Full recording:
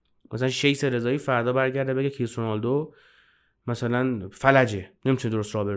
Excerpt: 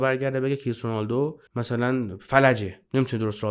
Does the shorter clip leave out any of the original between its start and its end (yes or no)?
yes